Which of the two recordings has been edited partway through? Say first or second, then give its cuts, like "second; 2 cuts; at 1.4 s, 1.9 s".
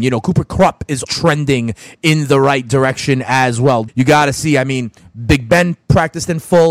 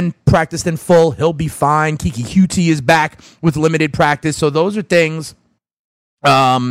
first; 2 cuts; at 1.0 s, 3.9 s